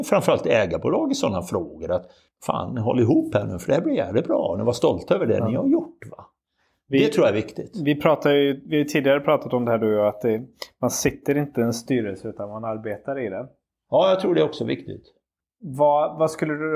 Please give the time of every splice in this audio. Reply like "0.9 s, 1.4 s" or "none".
none